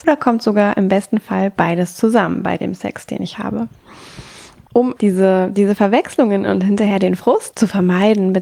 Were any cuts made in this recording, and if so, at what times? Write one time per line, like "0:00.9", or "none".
0:05.0
0:07.5